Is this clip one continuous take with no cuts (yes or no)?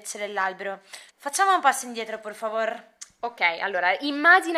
no